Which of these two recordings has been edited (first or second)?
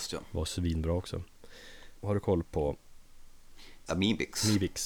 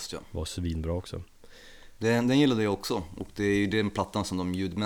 first